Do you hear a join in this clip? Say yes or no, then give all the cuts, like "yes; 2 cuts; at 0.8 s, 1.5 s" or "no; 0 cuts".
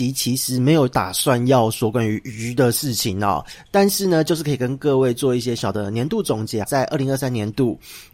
yes; 2 cuts; at 5.6 s, 6.6 s